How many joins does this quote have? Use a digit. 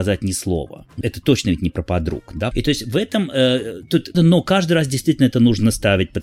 3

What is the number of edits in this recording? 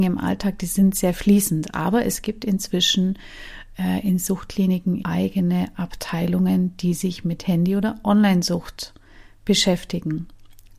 1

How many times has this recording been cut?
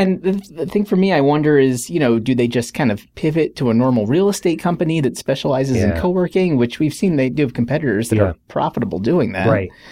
0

